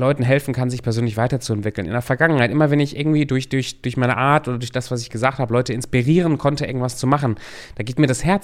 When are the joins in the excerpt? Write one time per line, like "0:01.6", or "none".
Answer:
none